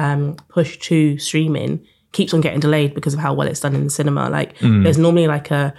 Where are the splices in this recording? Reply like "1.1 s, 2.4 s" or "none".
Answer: none